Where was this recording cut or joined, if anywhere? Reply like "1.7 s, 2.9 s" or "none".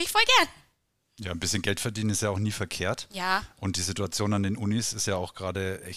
none